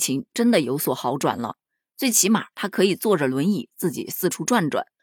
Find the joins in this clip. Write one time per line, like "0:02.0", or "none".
none